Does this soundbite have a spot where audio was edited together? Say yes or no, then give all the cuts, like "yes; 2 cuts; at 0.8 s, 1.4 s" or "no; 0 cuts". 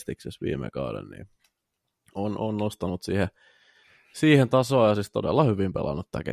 no; 0 cuts